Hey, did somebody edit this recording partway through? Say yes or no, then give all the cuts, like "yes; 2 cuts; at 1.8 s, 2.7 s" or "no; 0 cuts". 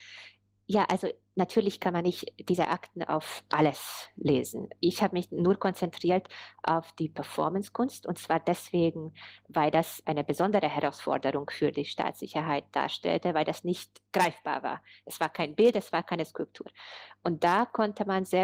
yes; 1 cut; at 10.0 s